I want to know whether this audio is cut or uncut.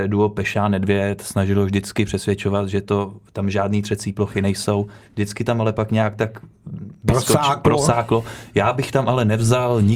uncut